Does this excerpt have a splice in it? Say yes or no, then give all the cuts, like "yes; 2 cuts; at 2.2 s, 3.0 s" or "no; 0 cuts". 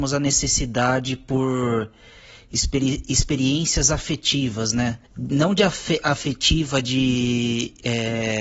yes; 1 cut; at 5.1 s